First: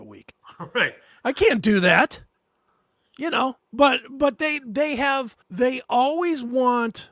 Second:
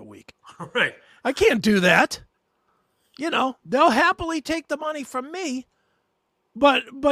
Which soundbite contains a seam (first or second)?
first